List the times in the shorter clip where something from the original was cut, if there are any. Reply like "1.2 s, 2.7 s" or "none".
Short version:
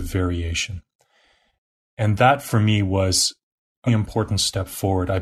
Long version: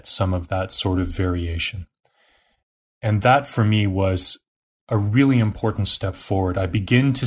3.9 s